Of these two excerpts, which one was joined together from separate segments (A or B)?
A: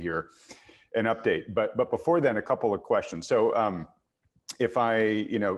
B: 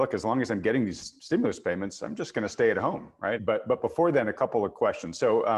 B